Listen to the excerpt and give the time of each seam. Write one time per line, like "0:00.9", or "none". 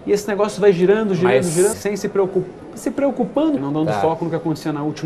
0:01.7
0:03.6